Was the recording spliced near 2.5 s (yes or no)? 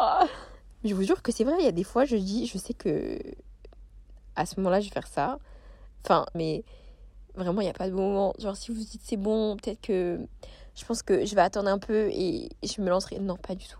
no